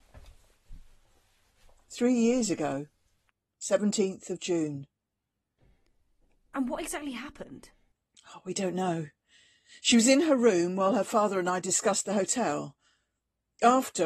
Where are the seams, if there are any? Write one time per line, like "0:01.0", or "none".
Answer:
none